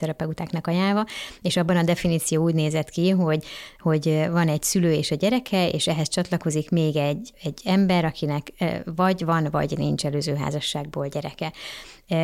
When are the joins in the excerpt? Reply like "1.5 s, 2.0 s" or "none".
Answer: 7.3 s

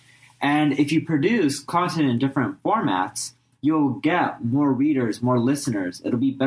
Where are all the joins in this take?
none

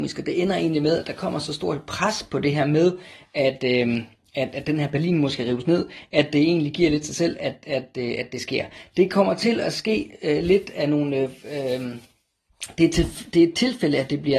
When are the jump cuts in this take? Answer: none

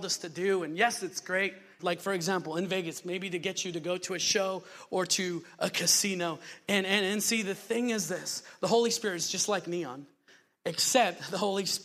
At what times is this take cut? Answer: 1.8 s

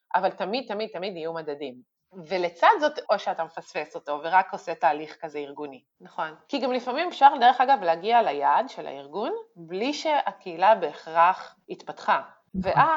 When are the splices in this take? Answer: 3.0 s, 6.0 s

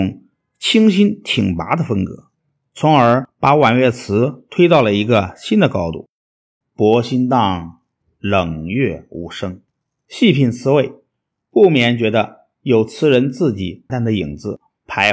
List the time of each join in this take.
6.6 s, 13.9 s

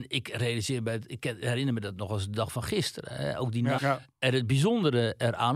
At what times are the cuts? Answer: 3.8 s

